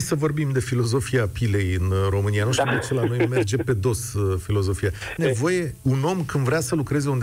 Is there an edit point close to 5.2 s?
yes; 1 cut; at 5.2 s

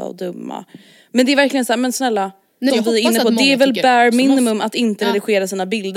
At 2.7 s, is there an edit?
yes; 1 cut; at 2.7 s

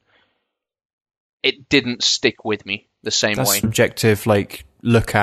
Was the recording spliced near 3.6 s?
yes; 1 cut; at 3.6 s

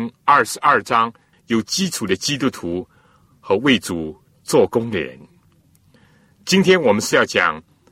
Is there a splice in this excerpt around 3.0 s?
no; 1 cut; at 1.3 s

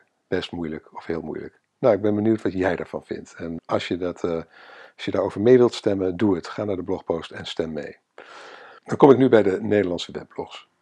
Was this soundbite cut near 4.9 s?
no; 2 cuts; at 3.6 s, 8.8 s

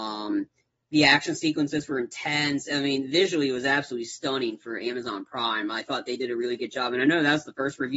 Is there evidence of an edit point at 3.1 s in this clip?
no; 0 cuts

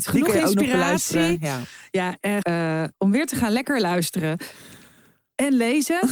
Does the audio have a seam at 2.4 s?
yes; 1 cut; at 2.4 s

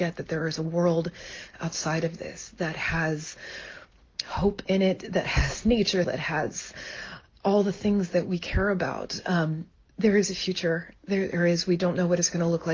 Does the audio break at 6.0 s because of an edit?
yes; 1 cut; at 6.0 s

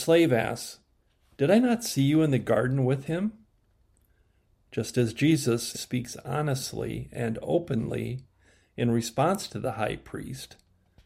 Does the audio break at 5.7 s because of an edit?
yes; 1 cut; at 5.7 s

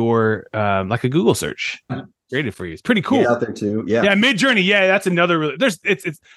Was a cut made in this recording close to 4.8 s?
no; 2 cuts; at 1.9 s, 3.2 s

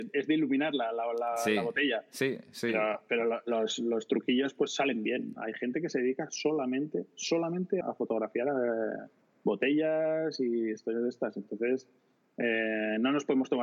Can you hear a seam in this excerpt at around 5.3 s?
yes; 2 cuts; at 5.3 s, 7.8 s

